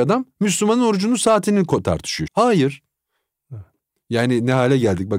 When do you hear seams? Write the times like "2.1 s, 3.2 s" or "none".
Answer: 2.3 s